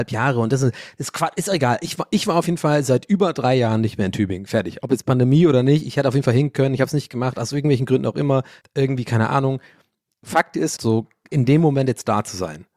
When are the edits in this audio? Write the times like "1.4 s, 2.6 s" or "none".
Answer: 8.6 s, 10.8 s